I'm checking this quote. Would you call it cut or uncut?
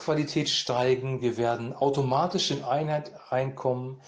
uncut